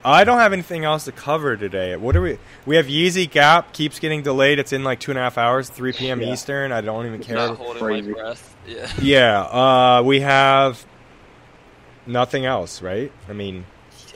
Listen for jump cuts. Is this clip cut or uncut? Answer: cut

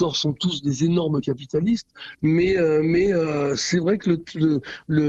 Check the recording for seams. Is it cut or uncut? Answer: cut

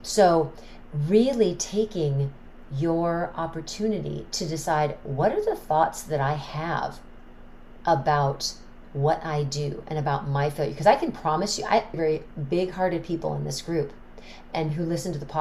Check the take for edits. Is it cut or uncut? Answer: cut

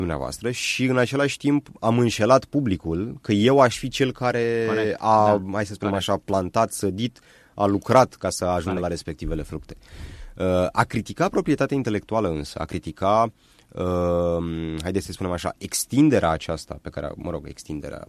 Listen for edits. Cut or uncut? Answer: uncut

